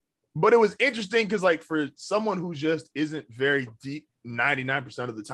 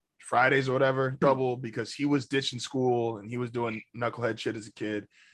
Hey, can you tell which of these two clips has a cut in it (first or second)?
second